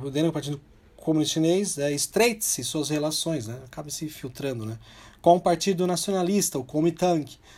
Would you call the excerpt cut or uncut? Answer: uncut